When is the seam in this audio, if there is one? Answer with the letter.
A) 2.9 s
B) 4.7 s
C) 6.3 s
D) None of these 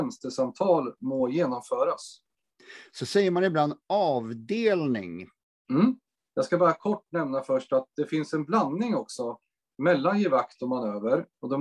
C